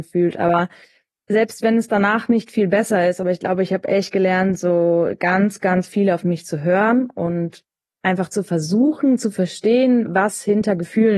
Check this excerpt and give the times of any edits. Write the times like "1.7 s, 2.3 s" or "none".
none